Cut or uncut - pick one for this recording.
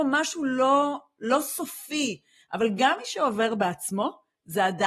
cut